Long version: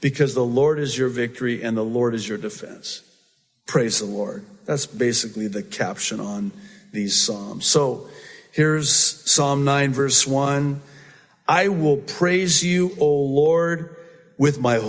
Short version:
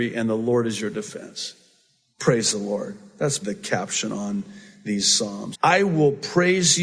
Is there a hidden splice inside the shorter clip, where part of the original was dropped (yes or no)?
yes